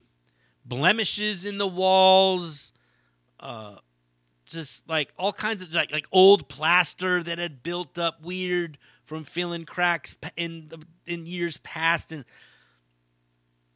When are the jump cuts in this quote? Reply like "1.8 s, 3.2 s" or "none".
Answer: none